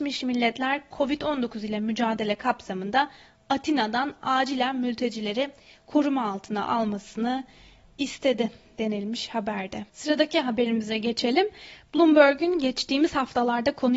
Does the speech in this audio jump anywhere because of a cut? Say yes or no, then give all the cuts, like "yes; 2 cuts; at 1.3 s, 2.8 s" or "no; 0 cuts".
yes; 1 cut; at 9.9 s